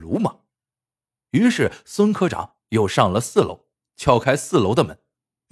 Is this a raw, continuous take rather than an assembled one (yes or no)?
yes